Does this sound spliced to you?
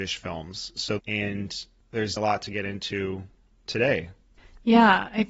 yes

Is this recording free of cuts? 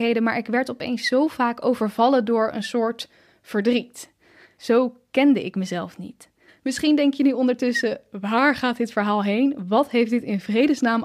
no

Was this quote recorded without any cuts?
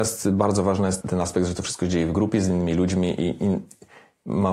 no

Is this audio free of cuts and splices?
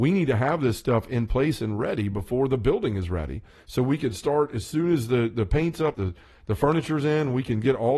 no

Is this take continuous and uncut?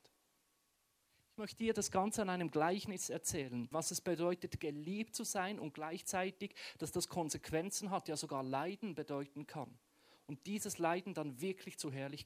no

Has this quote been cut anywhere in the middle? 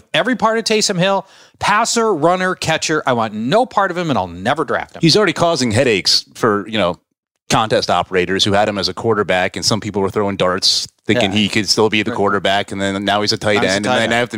no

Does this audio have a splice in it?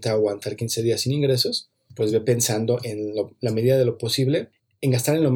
no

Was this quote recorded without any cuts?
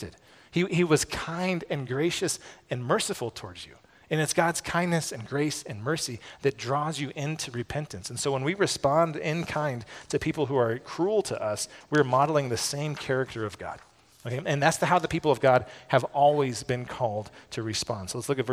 yes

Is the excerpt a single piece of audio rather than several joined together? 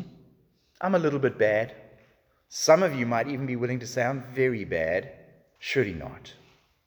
no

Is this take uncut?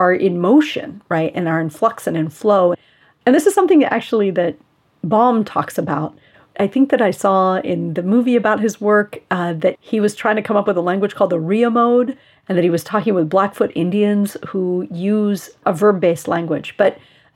yes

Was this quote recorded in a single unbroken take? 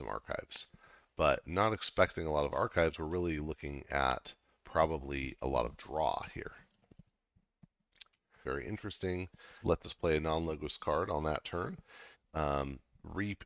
no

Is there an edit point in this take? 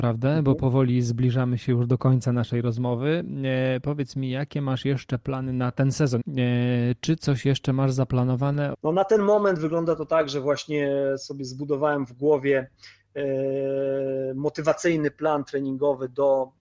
yes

